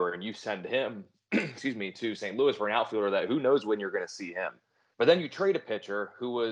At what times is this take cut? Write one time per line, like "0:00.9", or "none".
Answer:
0:04.9